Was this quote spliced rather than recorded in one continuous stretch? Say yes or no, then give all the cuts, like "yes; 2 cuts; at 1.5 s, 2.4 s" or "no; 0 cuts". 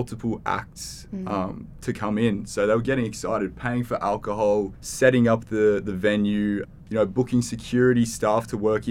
no; 0 cuts